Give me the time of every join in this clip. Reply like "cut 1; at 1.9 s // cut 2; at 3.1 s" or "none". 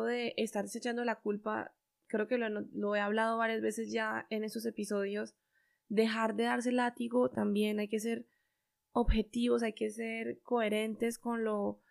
none